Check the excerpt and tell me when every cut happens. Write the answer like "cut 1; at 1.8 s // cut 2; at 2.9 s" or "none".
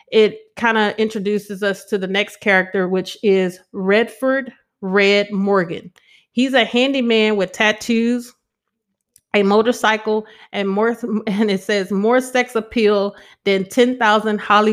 none